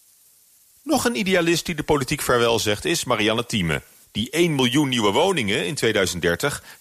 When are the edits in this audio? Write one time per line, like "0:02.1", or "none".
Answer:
0:04.0